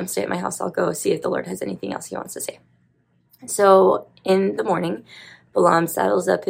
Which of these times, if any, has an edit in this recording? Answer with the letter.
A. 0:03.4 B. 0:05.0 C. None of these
A